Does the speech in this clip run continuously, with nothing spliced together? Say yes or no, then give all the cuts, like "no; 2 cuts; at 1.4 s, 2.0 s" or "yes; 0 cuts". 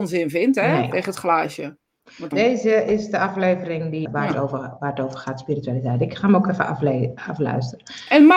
no; 3 cuts; at 0.9 s, 2.3 s, 4.0 s